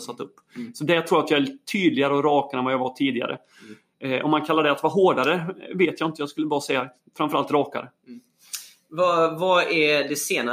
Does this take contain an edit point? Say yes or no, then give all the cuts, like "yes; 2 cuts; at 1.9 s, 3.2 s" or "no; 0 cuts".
no; 0 cuts